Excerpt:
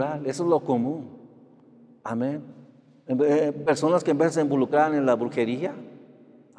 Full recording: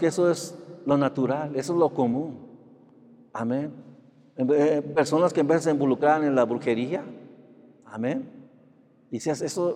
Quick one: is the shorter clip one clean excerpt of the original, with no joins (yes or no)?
yes